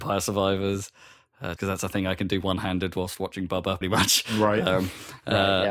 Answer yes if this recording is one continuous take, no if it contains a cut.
no